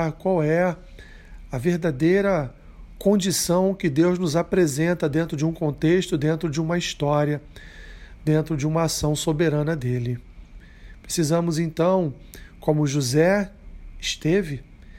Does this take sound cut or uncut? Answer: uncut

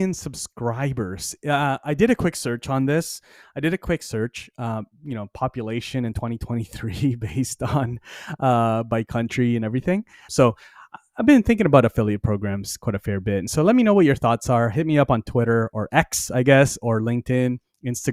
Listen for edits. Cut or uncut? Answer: cut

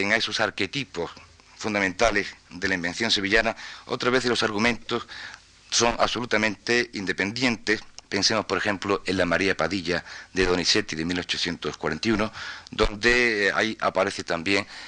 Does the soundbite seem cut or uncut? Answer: uncut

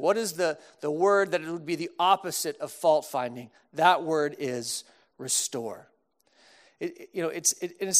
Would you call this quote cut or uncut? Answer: cut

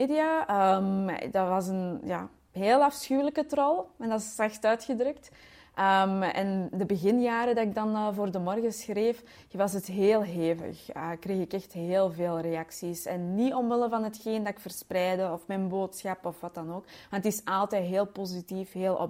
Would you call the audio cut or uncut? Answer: uncut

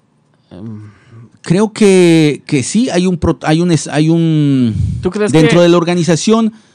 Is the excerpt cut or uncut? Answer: cut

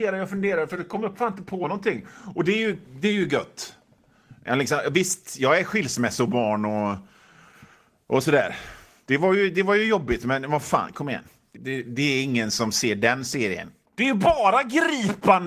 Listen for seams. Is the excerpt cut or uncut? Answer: cut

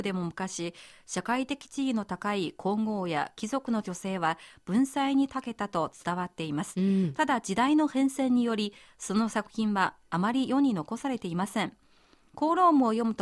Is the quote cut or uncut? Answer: uncut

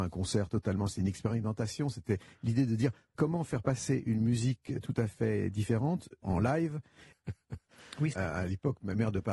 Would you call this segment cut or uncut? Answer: cut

